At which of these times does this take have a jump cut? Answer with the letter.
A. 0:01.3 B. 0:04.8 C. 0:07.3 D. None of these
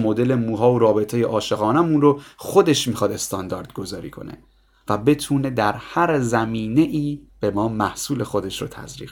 C